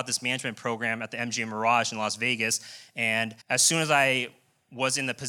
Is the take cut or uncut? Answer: cut